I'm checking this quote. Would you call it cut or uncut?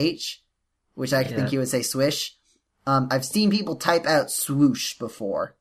uncut